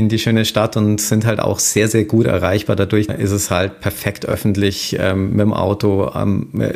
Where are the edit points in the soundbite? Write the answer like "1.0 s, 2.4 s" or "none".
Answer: 3.1 s